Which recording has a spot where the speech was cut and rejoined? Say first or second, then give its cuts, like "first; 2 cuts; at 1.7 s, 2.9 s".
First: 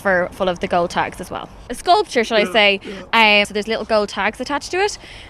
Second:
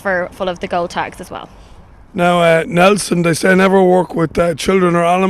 first; 2 cuts; at 1.7 s, 3.4 s